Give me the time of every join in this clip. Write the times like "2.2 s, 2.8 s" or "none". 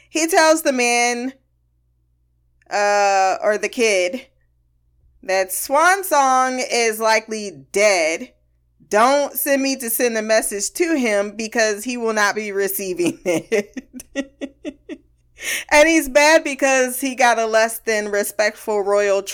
none